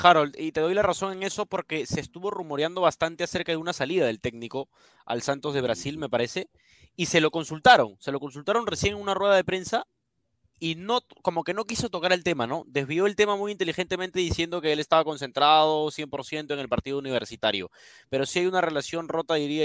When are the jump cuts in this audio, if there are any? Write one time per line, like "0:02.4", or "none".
none

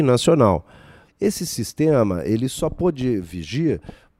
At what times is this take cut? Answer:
0:01.1

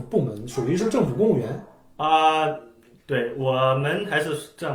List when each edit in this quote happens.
0:03.0

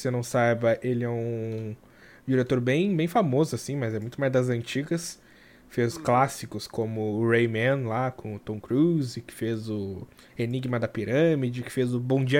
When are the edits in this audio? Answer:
none

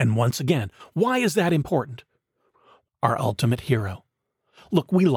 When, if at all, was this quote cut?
0:02.9

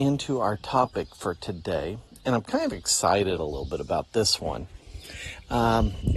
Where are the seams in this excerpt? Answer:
none

